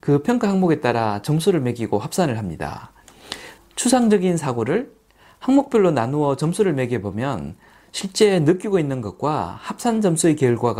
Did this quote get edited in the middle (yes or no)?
yes